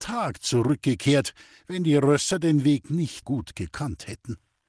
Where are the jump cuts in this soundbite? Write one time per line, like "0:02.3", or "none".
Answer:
0:03.2